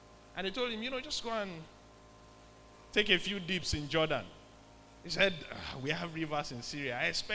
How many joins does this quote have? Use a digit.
0